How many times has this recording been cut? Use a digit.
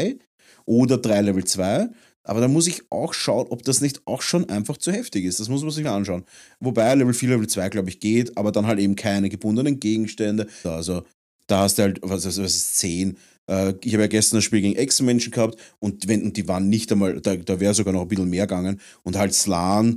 3